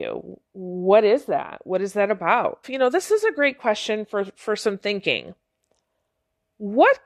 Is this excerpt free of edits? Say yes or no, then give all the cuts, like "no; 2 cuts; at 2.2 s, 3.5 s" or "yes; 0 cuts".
no; 1 cut; at 2.6 s